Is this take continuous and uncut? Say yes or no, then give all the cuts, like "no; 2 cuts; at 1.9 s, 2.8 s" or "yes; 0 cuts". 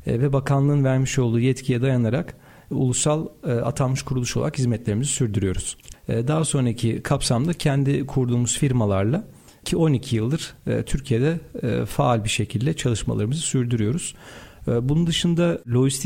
no; 1 cut; at 5.9 s